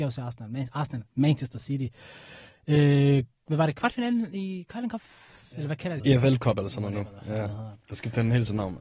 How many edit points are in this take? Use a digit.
1